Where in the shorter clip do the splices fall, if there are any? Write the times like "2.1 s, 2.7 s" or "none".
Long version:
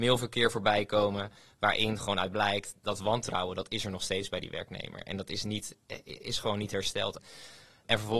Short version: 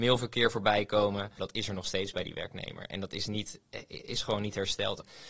1.4 s

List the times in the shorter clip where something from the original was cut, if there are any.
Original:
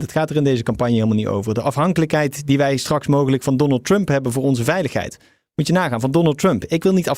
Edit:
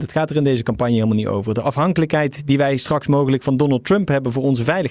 none

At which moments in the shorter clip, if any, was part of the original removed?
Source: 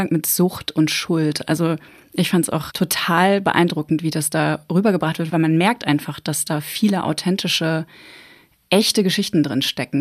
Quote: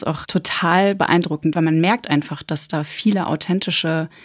1.5 s

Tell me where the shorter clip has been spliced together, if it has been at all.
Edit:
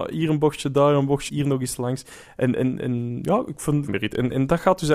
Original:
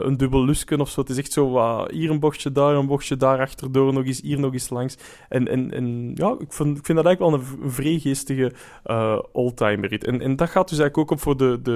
1.3 s, 3.9 s

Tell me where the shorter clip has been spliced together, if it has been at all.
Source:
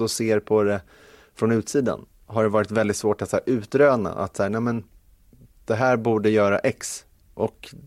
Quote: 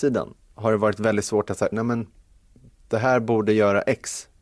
1.7 s

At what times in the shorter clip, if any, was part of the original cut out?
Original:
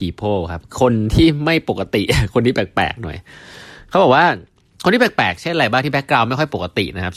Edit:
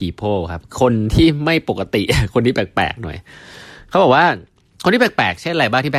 none

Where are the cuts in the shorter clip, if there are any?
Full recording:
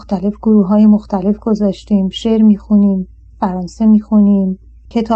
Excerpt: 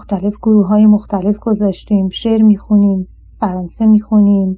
none

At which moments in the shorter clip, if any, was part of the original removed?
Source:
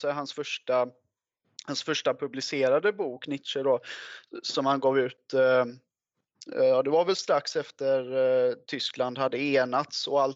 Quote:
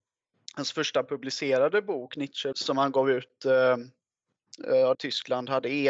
2.5 s, 4.9 s

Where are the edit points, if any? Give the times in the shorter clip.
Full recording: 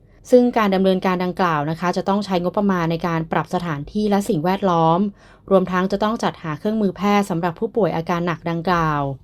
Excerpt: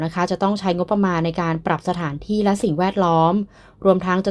none

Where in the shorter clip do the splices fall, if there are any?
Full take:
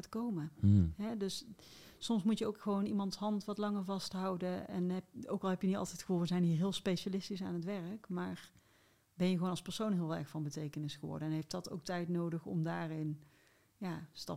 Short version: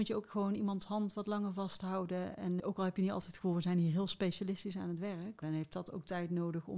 2.6 s, 5.4 s

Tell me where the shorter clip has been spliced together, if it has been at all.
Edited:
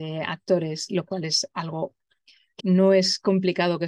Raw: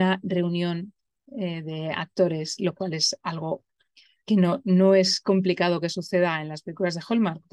2.6 s

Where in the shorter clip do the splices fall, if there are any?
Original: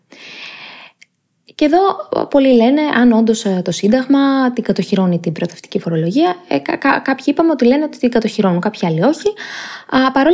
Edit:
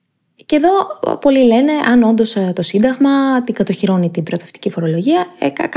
none

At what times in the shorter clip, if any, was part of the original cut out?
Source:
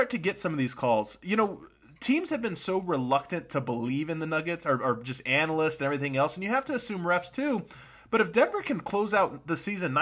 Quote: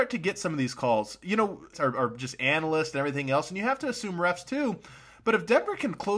1.7 s

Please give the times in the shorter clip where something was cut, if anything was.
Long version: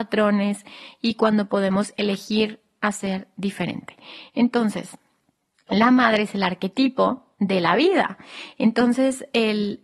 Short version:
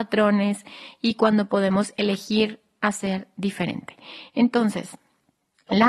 none

